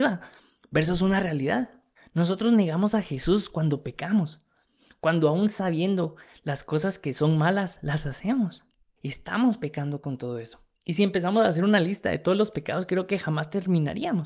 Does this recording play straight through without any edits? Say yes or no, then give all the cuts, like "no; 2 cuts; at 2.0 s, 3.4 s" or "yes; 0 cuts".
no; 2 cuts; at 2.0 s, 9.0 s